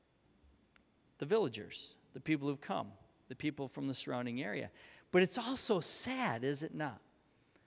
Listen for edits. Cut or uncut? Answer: uncut